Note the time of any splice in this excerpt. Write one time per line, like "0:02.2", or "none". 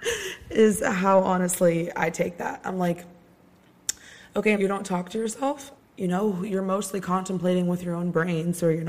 0:04.5
0:05.7